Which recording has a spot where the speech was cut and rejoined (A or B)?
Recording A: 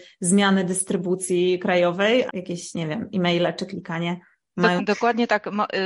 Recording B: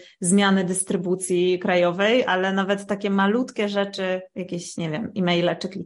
A